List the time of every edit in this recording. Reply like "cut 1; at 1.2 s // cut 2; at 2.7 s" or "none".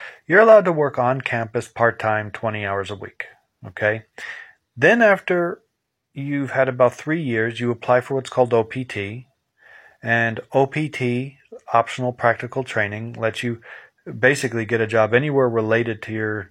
none